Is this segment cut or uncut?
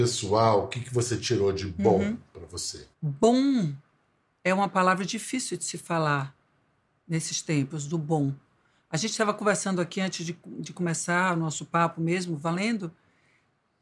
cut